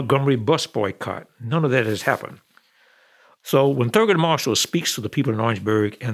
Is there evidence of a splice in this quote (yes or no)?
no